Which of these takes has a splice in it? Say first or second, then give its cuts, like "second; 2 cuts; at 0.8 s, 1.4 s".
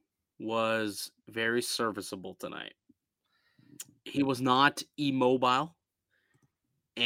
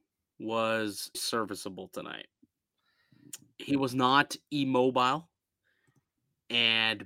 second; 1 cut; at 1.1 s